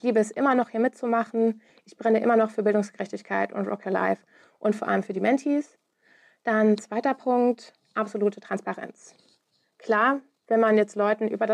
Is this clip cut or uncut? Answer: uncut